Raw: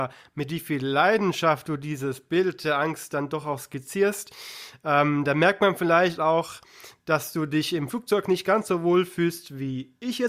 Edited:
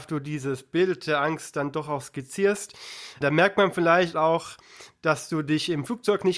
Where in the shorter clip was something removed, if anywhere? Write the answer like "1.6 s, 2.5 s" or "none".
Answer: 3.2 s